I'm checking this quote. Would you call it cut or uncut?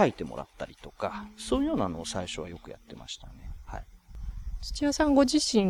uncut